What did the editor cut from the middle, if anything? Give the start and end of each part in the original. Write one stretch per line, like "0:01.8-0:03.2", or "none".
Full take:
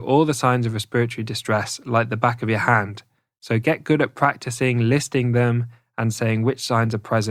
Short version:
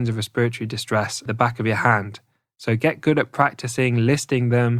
0:01.8-0:02.1

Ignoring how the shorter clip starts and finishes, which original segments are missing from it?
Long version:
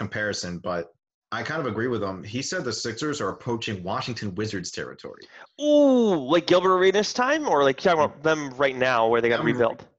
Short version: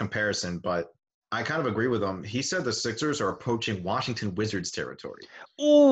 none

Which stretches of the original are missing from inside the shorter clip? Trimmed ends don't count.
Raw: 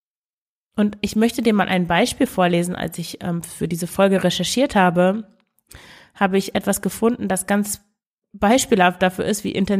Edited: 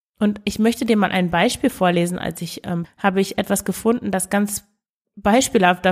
0:03.4-0:06.0

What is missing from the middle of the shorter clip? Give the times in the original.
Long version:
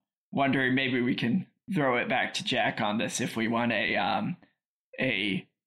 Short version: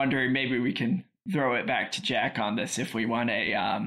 none

